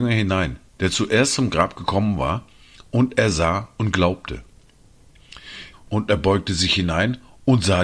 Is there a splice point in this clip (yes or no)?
yes